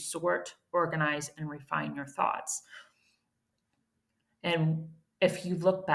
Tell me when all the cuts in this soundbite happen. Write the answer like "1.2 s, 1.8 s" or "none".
none